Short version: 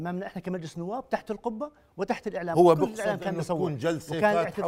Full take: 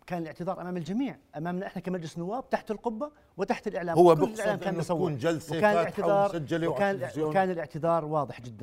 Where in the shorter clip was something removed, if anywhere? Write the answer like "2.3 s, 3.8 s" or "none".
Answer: none